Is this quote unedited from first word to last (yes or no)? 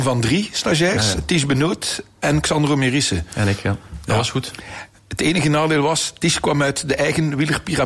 yes